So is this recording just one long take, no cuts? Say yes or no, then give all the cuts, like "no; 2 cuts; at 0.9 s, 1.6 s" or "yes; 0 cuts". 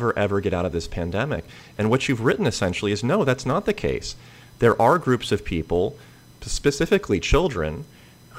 yes; 0 cuts